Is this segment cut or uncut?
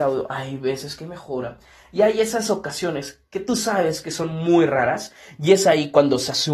uncut